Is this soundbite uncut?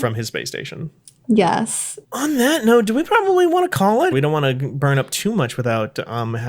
no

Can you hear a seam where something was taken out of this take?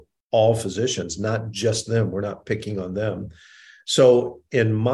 no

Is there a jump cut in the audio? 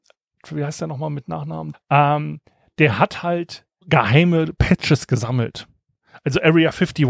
yes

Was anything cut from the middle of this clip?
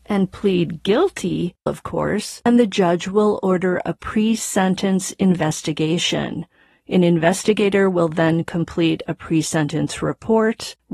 yes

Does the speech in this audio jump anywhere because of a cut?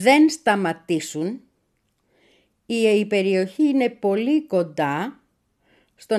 no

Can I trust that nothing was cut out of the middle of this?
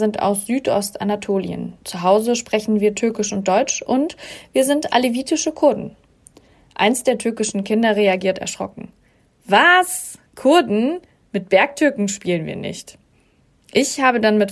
yes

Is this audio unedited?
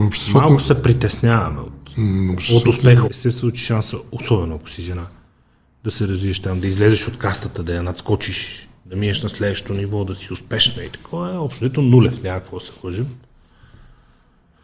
no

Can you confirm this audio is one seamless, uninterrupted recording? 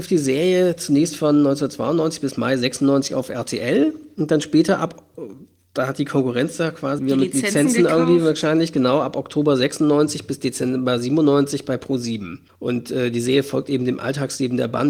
no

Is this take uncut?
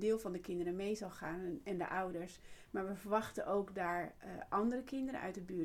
yes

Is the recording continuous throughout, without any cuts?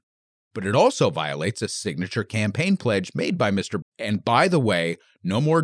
no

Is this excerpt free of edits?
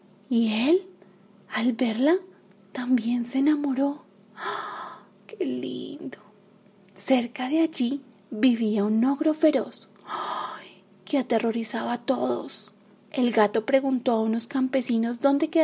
yes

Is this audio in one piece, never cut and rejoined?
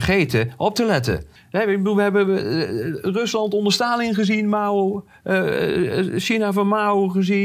no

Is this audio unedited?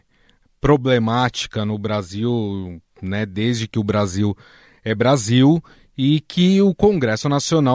yes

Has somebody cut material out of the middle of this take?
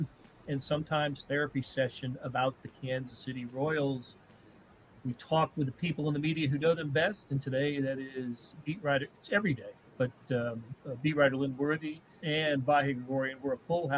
yes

